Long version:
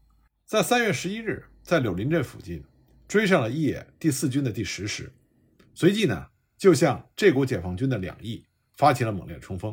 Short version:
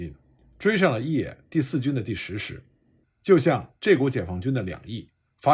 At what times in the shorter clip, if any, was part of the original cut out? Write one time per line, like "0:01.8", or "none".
0:03.0